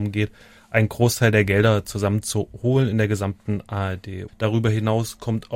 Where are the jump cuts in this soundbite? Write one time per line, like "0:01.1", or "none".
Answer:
0:04.3